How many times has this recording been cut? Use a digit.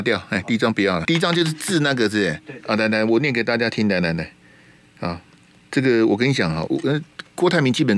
2